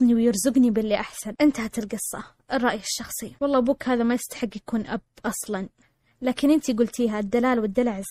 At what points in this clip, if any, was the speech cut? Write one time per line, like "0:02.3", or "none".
none